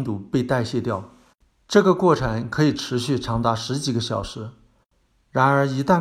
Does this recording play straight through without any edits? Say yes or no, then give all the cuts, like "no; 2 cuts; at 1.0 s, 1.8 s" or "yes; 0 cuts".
yes; 0 cuts